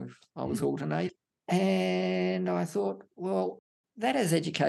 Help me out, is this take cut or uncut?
uncut